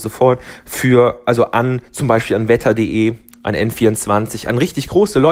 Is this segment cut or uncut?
uncut